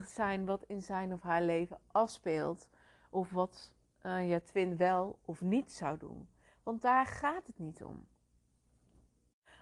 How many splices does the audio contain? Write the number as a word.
zero